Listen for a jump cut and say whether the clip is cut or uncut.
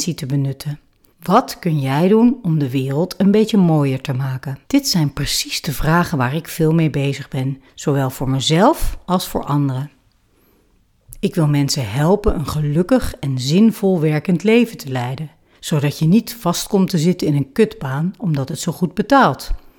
cut